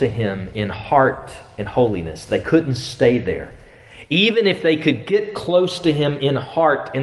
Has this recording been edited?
no; 0 cuts

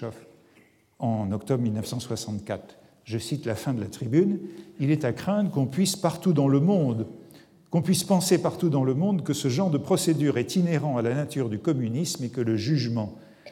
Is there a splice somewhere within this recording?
no; 0 cuts

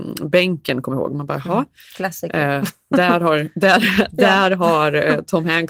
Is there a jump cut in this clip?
no; 0 cuts

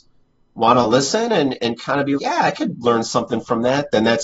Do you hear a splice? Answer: yes; 1 cut; at 2.2 s

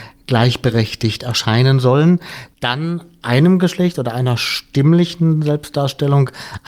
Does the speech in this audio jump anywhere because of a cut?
no; 0 cuts

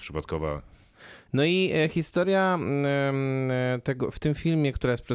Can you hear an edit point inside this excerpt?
yes; 1 cut; at 1.3 s

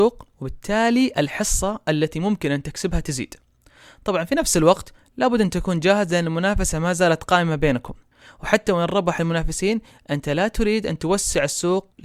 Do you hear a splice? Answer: no; 0 cuts

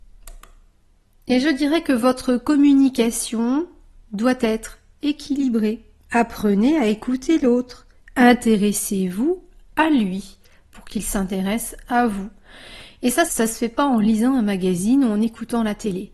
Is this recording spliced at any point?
yes; 1 cut; at 13.3 s

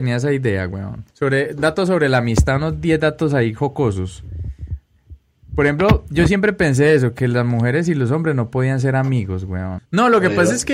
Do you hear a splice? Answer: yes; 2 cuts; at 1.1 s, 9.8 s

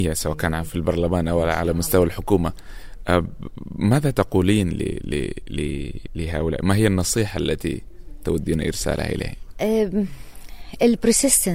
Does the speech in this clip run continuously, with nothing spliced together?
yes; 0 cuts

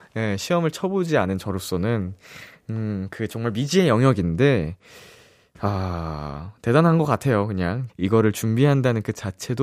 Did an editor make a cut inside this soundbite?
yes; 1 cut; at 7.9 s

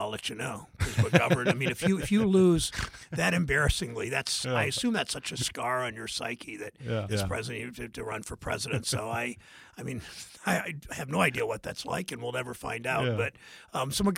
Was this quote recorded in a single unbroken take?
no; 1 cut; at 7.1 s

